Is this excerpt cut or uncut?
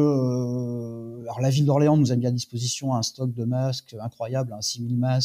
uncut